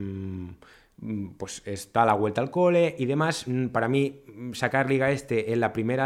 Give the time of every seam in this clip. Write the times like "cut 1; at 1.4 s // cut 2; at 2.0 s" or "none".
none